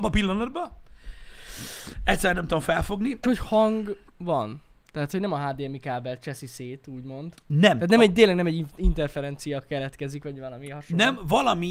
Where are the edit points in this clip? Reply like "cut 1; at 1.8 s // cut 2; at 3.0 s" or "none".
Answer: cut 1; at 3.2 s